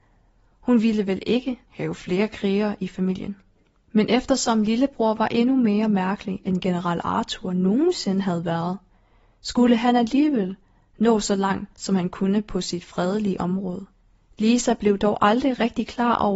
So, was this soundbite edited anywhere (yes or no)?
yes